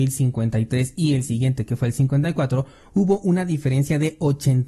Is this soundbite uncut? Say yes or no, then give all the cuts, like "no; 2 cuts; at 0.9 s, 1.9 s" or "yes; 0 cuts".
yes; 0 cuts